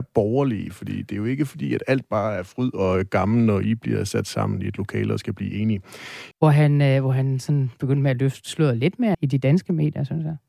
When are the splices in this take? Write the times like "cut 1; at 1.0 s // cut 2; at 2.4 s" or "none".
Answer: cut 1; at 6.3 s // cut 2; at 9.1 s